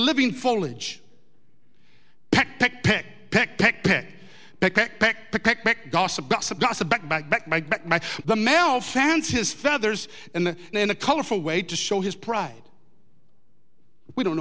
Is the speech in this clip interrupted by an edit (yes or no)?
yes